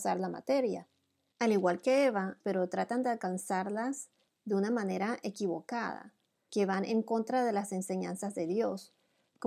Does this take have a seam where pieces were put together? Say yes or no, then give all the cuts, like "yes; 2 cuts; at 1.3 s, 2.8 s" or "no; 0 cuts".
yes; 3 cuts; at 1.3 s, 2.4 s, 6.5 s